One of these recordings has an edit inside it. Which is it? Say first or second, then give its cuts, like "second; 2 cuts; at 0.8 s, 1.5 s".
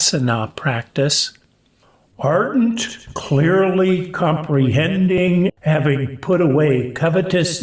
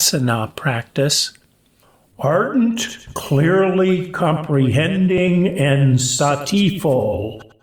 first; 1 cut; at 5.5 s